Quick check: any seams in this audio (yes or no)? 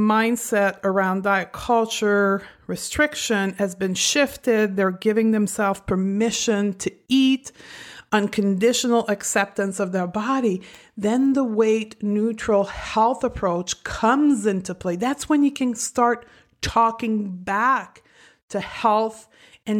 no